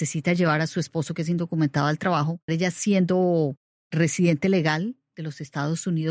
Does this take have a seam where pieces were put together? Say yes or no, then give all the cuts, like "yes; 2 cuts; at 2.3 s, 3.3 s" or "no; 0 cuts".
yes; 1 cut; at 2.5 s